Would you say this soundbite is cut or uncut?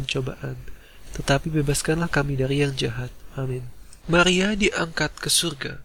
cut